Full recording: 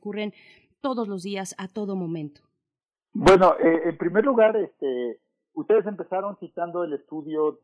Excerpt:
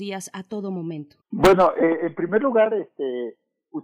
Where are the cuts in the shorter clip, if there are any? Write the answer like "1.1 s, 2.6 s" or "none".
1.2 s

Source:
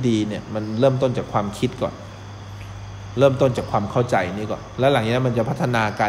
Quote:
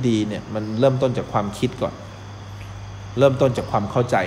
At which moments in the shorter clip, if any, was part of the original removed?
none

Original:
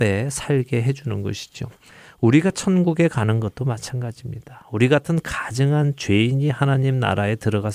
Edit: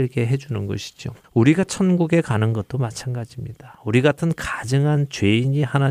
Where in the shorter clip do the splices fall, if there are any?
1.2 s

